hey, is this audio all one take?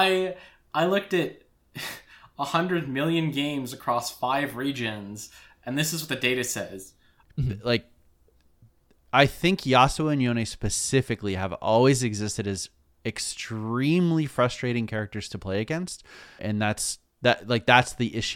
no; 2 cuts; at 7.2 s, 16.4 s

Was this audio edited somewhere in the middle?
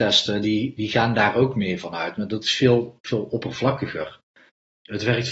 no; 0 cuts

